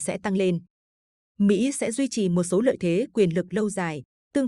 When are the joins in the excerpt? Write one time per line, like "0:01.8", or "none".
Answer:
0:01.3